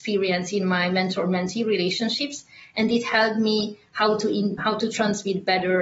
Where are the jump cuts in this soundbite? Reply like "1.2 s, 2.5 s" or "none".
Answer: 4.6 s